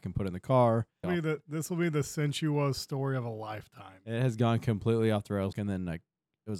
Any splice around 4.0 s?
no; 2 cuts; at 1.0 s, 5.5 s

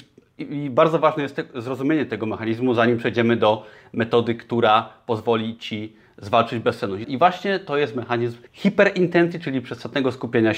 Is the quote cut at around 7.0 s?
yes; 2 cuts; at 7.0 s, 8.5 s

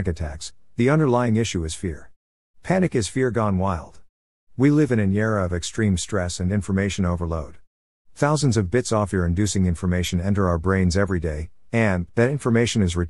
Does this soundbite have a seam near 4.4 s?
no; 1 cut; at 12.1 s

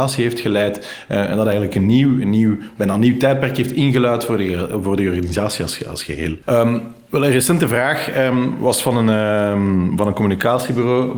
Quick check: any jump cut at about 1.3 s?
no; 1 cut; at 6.4 s

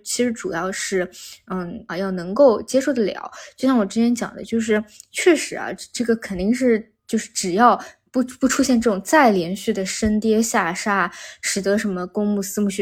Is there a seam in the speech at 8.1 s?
no; 1 cut; at 1.9 s

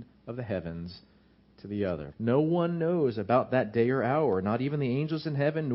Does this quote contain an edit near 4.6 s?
no; 1 cut; at 2.1 s

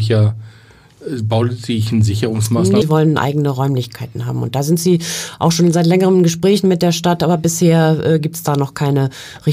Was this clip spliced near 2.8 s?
yes; 1 cut; at 2.8 s

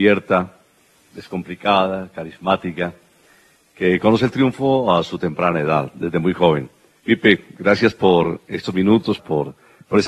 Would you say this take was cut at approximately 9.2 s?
yes; 2 cuts; at 7.0 s, 9.2 s

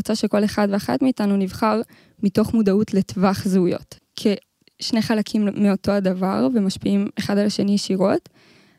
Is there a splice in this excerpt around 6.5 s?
no; 1 cut; at 4.0 s

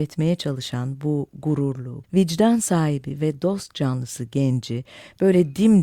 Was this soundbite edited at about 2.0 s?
yes; 1 cut; at 2.0 s

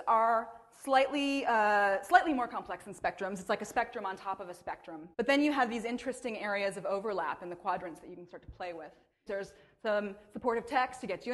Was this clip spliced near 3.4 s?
no; 2 cuts; at 5.1 s, 9.3 s

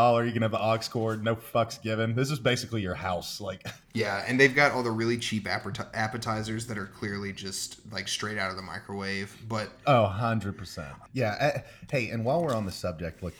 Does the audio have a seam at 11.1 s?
yes; 2 cuts; at 3.9 s, 11.1 s

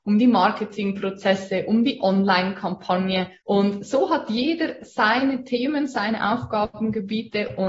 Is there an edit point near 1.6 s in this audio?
no; 1 cut; at 3.4 s

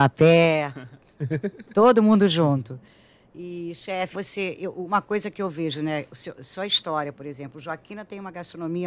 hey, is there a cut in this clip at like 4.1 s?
yes; 1 cut; at 4.1 s

